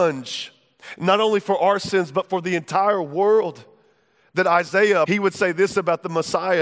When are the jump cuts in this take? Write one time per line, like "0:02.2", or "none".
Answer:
0:05.0